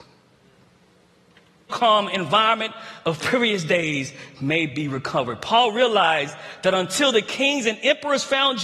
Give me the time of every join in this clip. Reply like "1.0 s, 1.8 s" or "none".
1.7 s